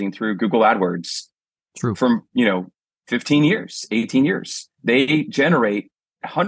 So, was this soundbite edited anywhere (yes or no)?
no